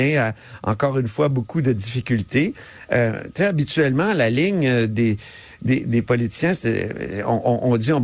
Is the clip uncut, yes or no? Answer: yes